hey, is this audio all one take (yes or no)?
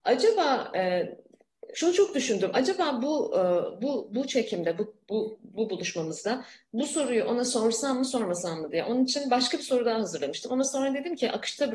no